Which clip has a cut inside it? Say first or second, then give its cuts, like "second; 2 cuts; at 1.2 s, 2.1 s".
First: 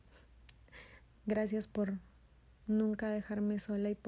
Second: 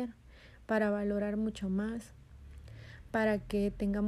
first; 1 cut; at 1.2 s